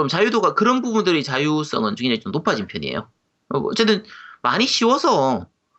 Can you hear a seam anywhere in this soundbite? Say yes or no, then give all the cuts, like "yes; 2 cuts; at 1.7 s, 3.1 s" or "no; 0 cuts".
no; 0 cuts